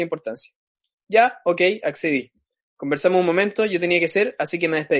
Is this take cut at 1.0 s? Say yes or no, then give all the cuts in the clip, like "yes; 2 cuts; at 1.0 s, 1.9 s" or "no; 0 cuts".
yes; 1 cut; at 1.0 s